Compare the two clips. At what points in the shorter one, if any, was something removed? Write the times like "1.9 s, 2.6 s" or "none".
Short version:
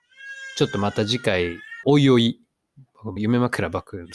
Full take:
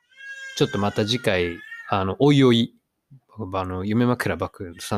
1.8 s, 3.2 s